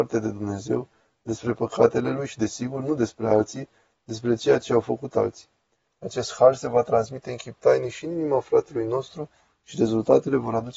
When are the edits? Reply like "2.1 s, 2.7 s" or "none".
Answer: 5.9 s